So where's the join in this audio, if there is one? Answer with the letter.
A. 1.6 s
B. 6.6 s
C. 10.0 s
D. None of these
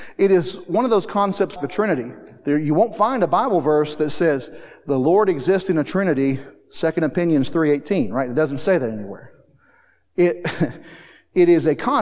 A